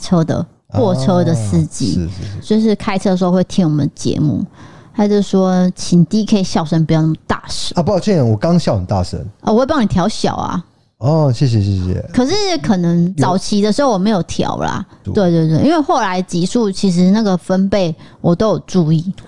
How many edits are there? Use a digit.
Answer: 1